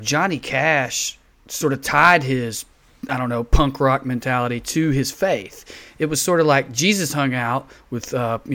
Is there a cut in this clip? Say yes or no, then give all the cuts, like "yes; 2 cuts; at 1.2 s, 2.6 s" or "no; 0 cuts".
no; 0 cuts